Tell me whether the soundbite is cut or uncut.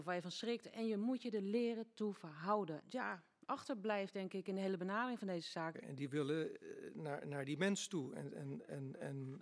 cut